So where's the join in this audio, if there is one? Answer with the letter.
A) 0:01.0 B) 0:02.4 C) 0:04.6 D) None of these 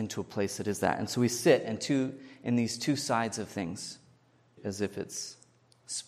C